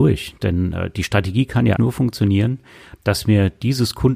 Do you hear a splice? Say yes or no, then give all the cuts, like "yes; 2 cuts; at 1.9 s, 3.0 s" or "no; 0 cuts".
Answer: yes; 2 cuts; at 1.8 s, 3.0 s